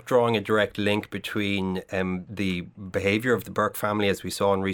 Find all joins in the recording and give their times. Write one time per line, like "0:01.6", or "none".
none